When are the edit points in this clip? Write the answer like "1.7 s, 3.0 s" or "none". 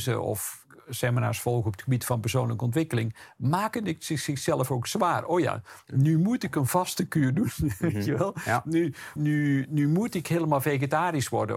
9.2 s